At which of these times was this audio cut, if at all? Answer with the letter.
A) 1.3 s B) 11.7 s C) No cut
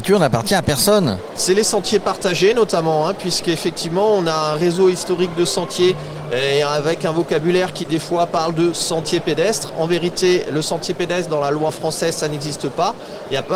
B